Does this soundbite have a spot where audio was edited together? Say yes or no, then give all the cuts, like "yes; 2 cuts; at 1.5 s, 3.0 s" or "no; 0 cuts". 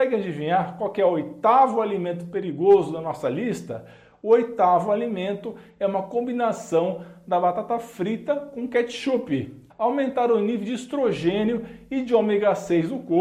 yes; 1 cut; at 9.7 s